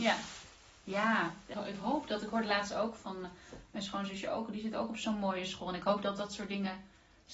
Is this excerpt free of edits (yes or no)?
no